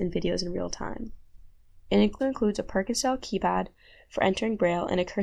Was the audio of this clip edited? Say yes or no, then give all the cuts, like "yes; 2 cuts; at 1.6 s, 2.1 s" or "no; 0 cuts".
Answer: yes; 1 cut; at 2.2 s